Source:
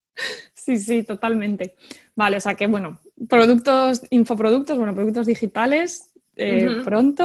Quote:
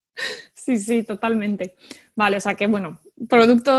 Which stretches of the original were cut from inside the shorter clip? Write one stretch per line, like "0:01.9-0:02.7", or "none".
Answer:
none